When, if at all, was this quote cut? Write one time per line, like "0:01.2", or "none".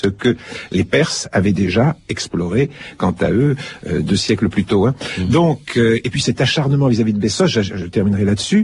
none